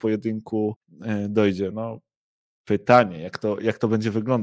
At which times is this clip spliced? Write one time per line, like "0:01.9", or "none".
none